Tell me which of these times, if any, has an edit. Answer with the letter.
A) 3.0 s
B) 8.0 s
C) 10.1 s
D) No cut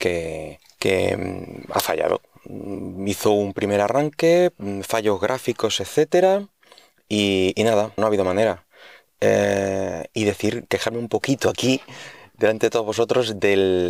B